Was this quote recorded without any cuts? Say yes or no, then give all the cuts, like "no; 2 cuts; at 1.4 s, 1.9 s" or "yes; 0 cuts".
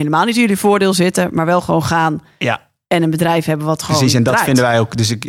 yes; 0 cuts